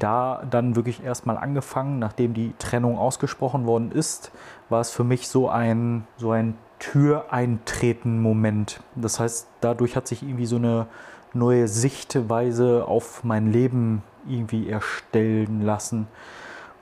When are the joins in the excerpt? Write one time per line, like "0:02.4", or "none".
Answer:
0:06.1